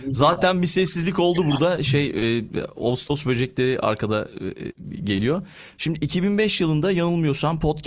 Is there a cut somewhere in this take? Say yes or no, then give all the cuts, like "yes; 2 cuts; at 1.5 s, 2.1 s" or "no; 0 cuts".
yes; 1 cut; at 5.8 s